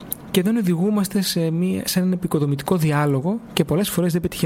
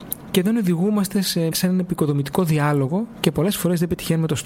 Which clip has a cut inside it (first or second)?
second